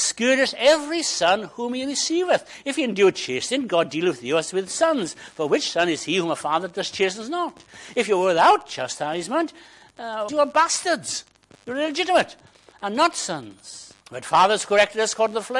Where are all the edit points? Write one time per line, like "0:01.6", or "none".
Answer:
0:10.3
0:14.0